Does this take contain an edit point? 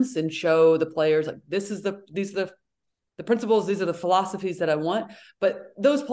no; 0 cuts

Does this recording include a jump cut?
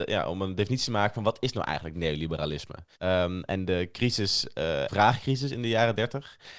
yes; 2 cuts; at 3.0 s, 4.9 s

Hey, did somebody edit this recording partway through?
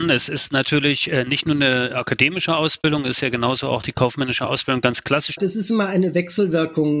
yes; 1 cut; at 5.4 s

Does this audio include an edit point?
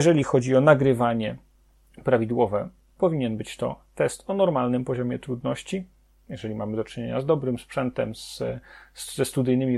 no; 0 cuts

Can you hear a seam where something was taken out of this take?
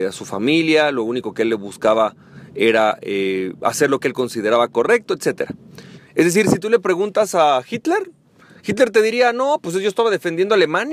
yes; 1 cut; at 6.0 s

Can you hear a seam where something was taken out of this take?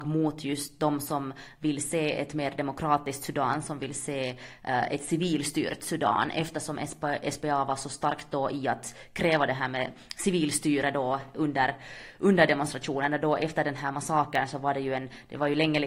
no; 0 cuts

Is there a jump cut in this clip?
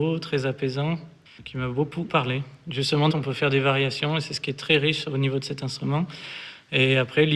yes; 2 cuts; at 2.1 s, 3.1 s

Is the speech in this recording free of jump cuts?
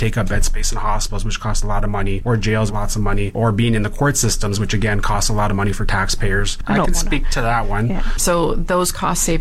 no; 3 cuts; at 2.7 s, 6.6 s, 8.2 s

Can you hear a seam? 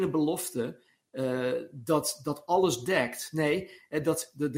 no; 0 cuts

